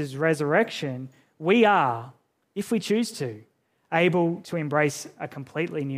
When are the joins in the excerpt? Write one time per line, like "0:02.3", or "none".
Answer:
none